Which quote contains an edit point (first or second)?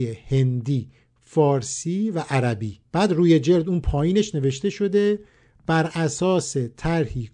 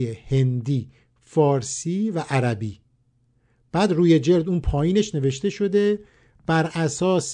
first